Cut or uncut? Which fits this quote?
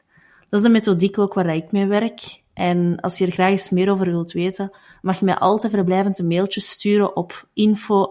uncut